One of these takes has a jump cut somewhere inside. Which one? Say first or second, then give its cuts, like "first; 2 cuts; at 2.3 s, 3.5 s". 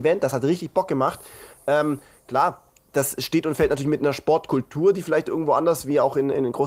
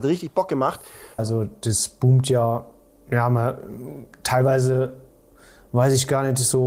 second; 1 cut; at 1.2 s